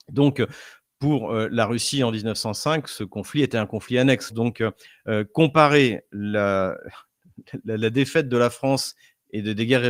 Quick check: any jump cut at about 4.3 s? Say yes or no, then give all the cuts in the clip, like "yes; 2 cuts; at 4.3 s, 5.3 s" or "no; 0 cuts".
yes; 1 cut; at 4.3 s